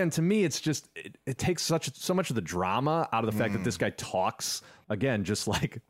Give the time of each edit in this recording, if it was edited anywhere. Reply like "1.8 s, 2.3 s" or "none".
1.4 s, 4.8 s